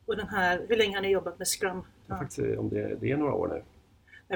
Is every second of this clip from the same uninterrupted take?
no; 1 cut; at 2.0 s

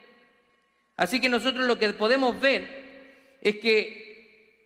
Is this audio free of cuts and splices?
yes; 0 cuts

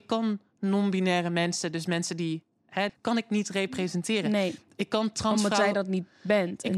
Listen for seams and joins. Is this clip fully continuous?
no; 1 cut; at 2.9 s

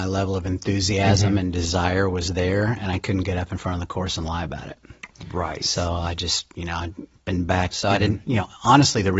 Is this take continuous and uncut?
no; 1 cut; at 7.7 s

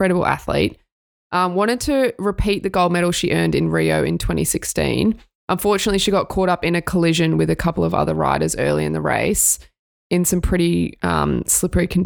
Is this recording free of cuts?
yes; 0 cuts

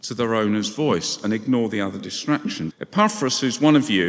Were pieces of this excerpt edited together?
yes; 1 cut; at 2.7 s

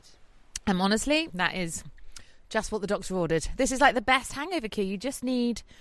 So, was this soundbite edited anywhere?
yes; 1 cut; at 1.3 s

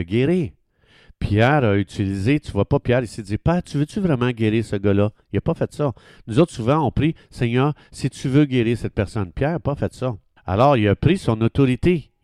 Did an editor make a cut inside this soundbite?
yes; 1 cut; at 10.4 s

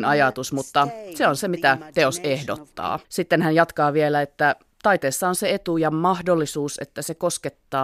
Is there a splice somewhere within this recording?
yes; 1 cut; at 3.0 s

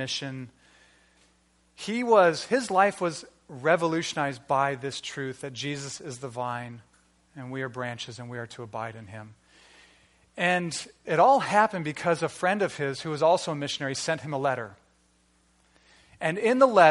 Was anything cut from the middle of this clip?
no; 0 cuts

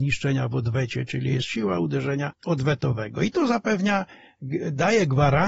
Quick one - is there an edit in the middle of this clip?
no; 0 cuts

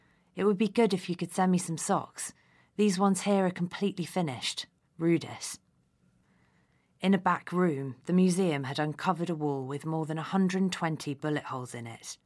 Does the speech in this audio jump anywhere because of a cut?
yes; 1 cut; at 4.9 s

